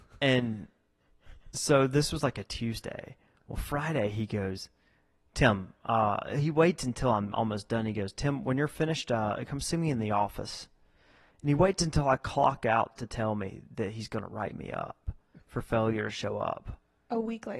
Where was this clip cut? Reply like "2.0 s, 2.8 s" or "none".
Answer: none

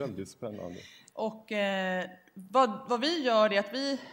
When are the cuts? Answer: 1.1 s

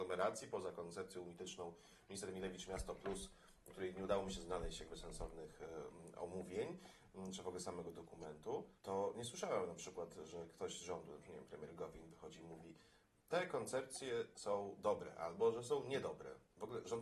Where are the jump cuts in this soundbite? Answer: 8.8 s

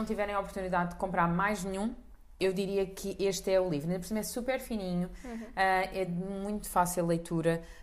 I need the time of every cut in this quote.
none

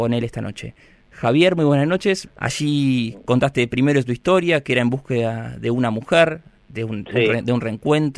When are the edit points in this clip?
2.2 s

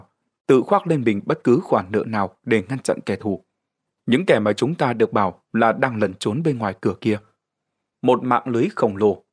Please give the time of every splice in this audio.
7.9 s

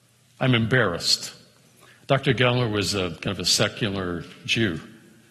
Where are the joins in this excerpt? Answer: none

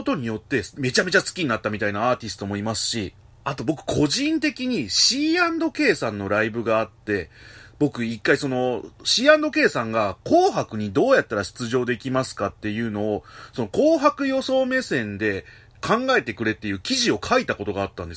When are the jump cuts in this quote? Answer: none

